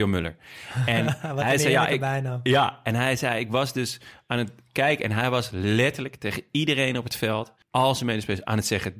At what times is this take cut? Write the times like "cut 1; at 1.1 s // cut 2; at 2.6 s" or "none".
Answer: cut 1; at 7.6 s